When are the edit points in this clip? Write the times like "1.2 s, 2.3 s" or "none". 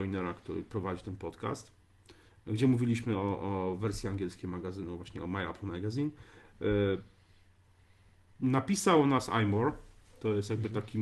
none